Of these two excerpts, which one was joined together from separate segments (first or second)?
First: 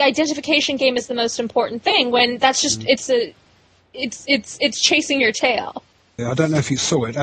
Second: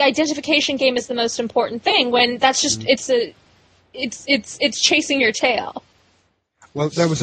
first